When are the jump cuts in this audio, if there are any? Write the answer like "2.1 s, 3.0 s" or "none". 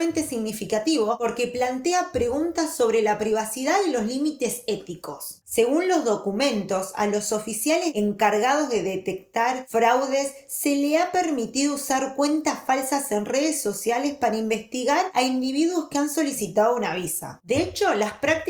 5.4 s, 17.4 s

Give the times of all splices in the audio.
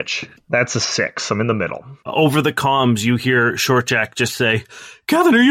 2.0 s

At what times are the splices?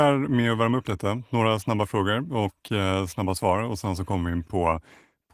none

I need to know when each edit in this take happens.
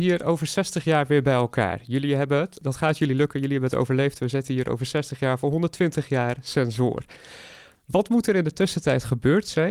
none

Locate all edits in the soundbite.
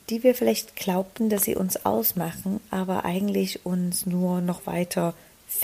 none

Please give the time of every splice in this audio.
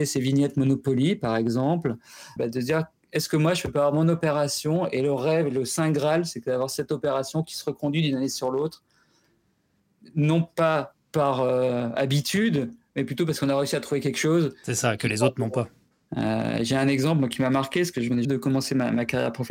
2.4 s, 16.1 s, 18.2 s

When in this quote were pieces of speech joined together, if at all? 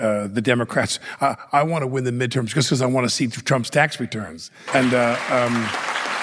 4.7 s

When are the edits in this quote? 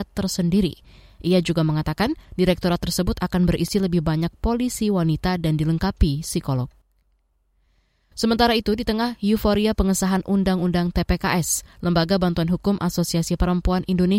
none

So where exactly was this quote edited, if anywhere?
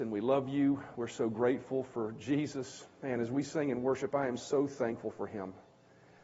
none

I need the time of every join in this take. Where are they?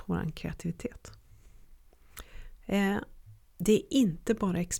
none

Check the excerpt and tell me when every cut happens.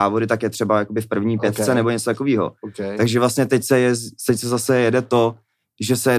none

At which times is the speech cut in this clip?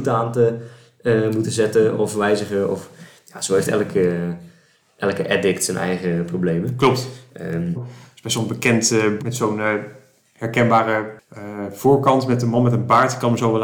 7.7 s, 9.2 s

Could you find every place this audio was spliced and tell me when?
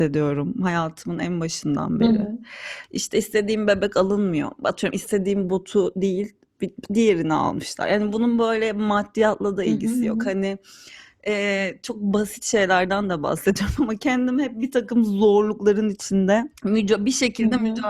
16.5 s

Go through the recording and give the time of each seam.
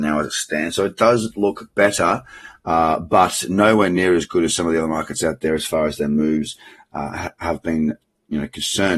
none

